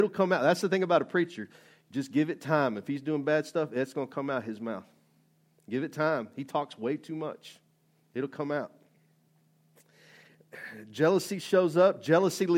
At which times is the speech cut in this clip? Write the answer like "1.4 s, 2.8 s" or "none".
none